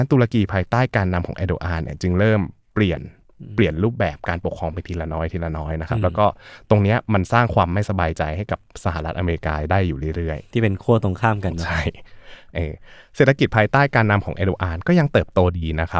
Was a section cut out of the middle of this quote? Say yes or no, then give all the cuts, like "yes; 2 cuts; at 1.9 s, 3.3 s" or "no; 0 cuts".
no; 0 cuts